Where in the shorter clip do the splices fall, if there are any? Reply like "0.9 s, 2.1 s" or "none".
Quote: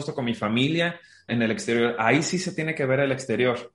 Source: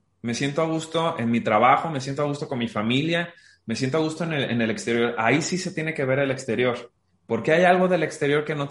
1.3 s